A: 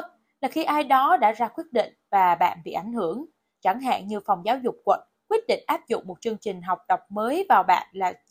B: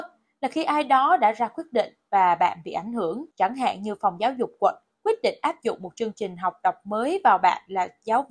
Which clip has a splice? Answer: B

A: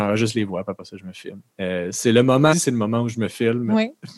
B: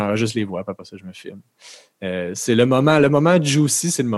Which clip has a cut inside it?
A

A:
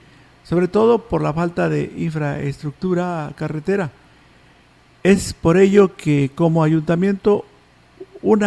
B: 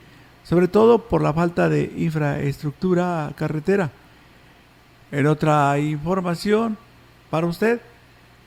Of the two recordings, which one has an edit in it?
B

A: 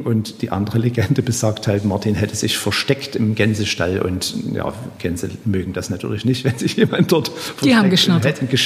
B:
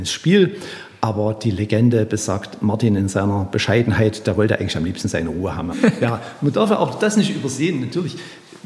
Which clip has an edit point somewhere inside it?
B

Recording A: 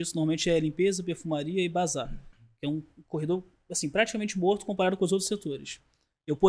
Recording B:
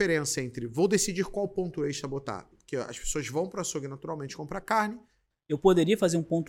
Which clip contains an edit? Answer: B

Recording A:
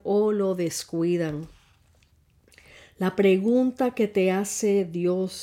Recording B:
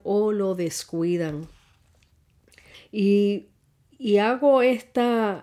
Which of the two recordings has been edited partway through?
B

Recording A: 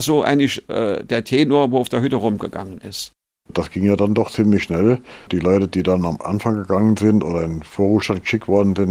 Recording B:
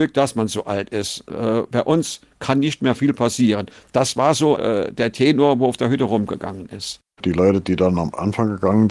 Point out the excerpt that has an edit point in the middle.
B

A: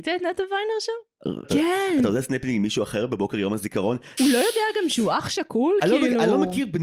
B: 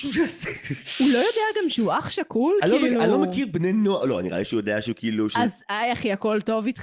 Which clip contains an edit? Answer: A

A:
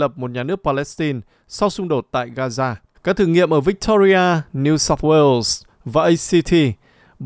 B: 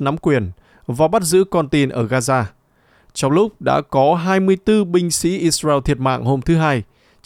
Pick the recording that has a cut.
A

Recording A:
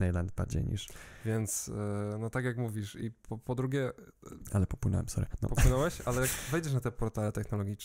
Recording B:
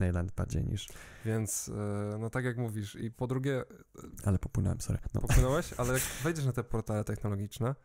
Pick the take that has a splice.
B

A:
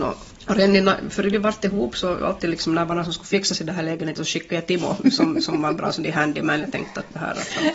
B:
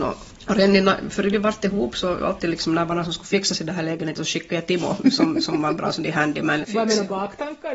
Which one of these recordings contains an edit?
B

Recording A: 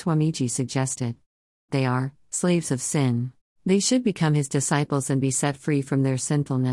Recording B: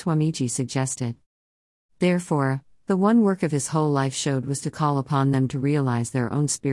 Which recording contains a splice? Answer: A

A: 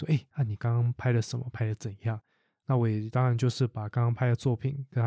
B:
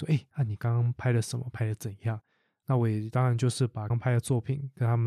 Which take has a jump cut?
B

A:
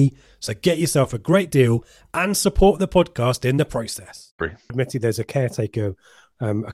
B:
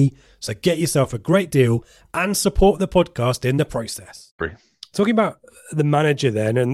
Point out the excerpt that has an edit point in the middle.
A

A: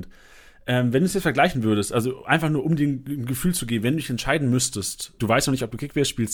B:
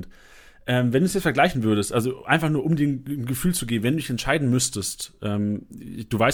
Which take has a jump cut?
A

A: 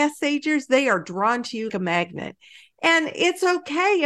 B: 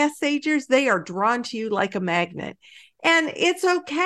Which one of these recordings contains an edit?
A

